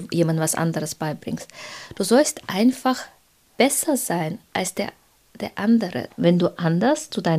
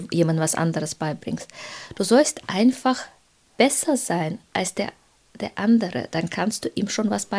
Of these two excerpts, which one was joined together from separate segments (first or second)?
first